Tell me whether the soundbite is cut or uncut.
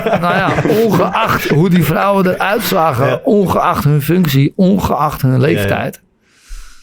uncut